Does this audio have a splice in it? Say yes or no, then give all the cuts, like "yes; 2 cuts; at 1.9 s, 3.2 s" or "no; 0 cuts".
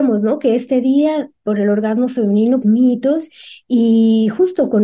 yes; 1 cut; at 2.6 s